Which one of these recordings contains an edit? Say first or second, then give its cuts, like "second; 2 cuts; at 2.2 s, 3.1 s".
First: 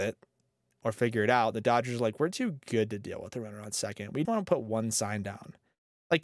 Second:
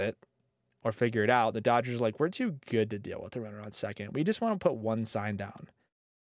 first; 1 cut; at 4.2 s